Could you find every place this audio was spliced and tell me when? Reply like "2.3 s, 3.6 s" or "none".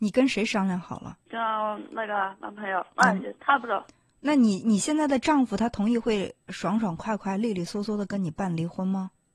1.2 s

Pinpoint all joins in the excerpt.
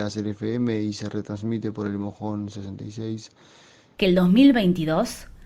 4.0 s

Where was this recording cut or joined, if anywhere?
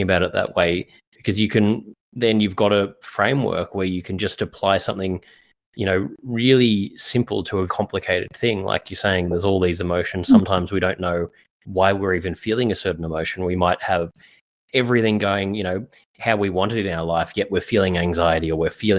7.7 s

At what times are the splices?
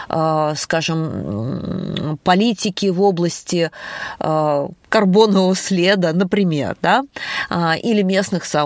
none

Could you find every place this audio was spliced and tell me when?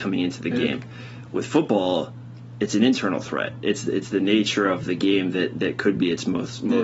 none

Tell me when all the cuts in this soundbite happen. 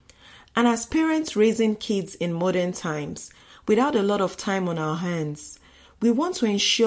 none

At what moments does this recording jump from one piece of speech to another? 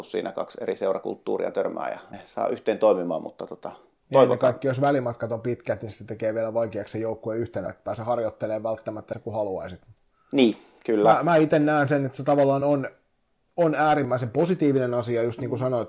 none

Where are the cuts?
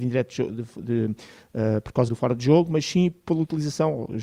2.1 s

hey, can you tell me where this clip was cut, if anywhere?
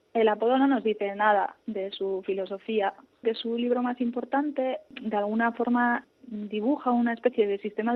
3.2 s

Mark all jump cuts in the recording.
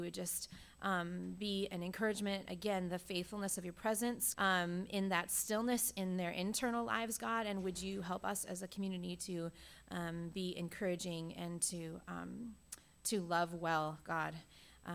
4.3 s

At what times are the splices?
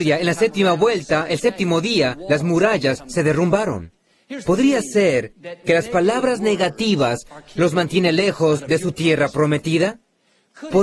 4.4 s

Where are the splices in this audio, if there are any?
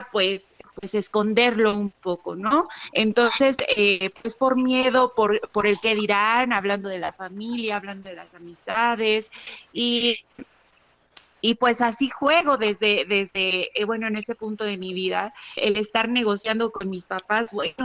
15.6 s

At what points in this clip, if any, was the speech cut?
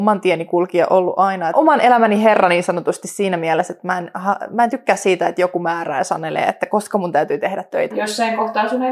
1.5 s, 7.9 s

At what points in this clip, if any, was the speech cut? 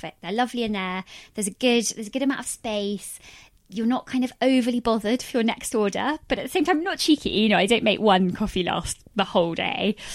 none

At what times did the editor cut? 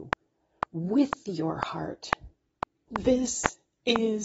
2.9 s

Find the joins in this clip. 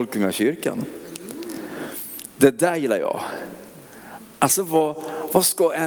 none

